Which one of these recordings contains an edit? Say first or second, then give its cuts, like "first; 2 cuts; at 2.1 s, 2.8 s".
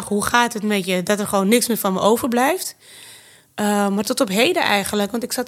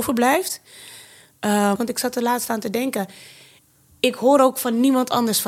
second; 1 cut; at 1.7 s